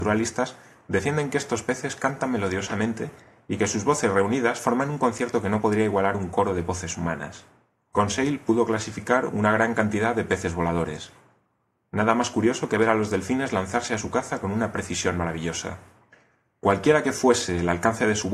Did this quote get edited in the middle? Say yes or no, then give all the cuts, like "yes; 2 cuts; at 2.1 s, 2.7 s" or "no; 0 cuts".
yes; 1 cut; at 7.8 s